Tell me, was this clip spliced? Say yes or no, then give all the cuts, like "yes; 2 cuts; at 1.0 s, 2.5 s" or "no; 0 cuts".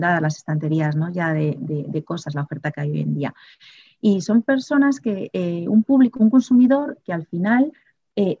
no; 0 cuts